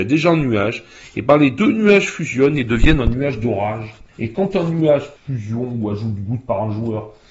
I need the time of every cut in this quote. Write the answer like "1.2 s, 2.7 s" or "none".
4.1 s, 5.2 s